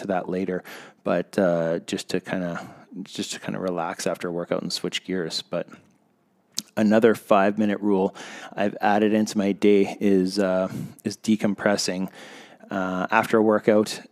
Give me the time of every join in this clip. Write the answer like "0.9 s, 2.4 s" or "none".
none